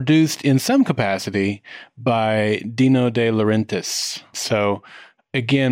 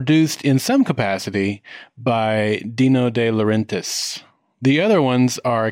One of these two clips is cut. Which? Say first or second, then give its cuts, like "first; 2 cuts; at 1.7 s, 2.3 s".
first; 1 cut; at 4.3 s